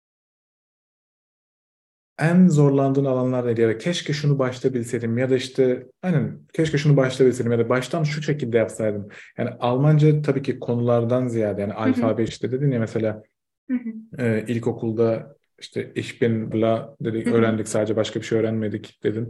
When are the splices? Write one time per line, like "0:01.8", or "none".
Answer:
0:12.3
0:16.5